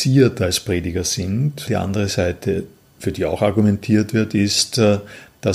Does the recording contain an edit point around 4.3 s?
no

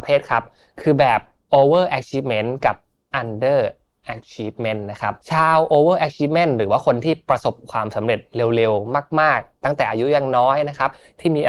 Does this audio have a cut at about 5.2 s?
yes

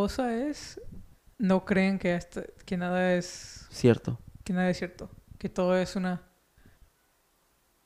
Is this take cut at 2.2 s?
no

